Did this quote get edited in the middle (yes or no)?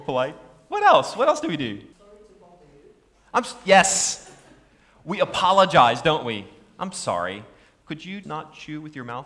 yes